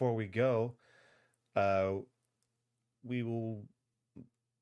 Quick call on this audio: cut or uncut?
cut